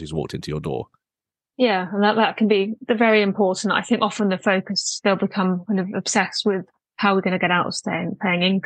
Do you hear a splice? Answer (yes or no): no